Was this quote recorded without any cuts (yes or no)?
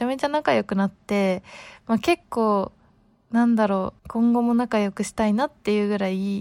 no